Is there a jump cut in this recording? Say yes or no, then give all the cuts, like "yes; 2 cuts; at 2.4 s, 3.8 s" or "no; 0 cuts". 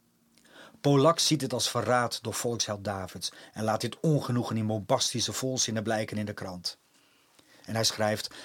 no; 0 cuts